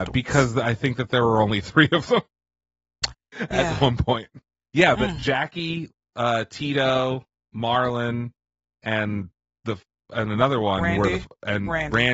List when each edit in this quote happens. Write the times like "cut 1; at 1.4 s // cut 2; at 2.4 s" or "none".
none